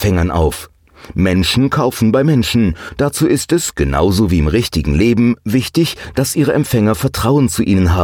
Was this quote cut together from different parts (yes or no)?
no